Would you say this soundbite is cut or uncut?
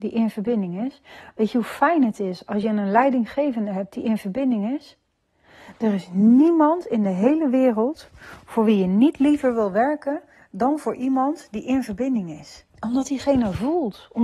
cut